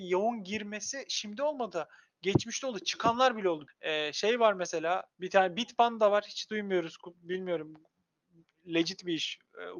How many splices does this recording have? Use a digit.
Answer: 2